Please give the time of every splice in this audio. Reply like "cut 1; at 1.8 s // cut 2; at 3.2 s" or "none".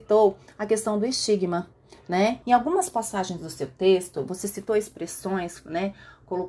cut 1; at 2.4 s